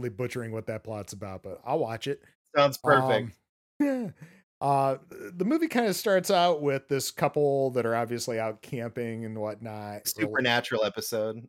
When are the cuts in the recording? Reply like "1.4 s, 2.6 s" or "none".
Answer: 5.0 s, 10.0 s

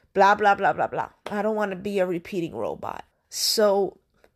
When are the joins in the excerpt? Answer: 3.1 s

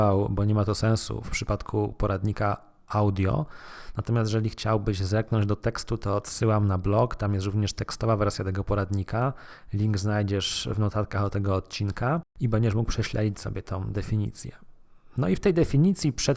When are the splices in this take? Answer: none

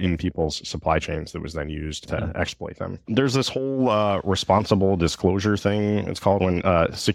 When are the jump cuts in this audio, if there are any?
3.0 s

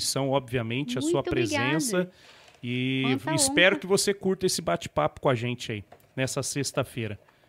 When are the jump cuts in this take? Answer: none

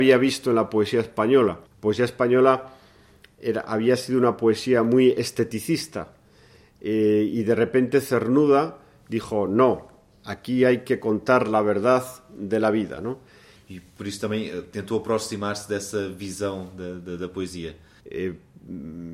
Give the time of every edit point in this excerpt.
1.7 s, 13.6 s, 18.0 s

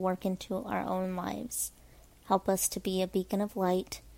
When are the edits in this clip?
2.1 s

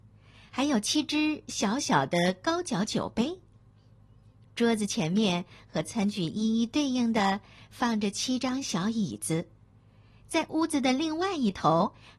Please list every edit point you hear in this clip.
none

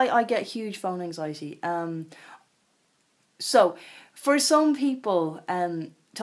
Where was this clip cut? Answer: none

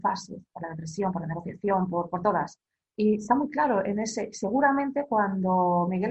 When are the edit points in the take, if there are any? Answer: none

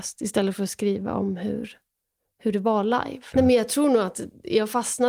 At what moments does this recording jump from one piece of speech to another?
3.3 s

